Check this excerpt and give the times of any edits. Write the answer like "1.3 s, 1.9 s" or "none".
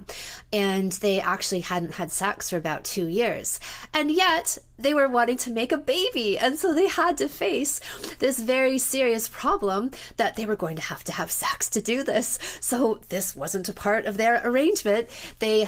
none